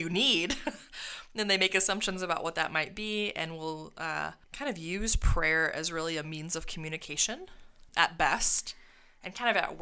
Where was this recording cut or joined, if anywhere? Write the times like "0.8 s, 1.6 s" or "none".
4.4 s, 7.9 s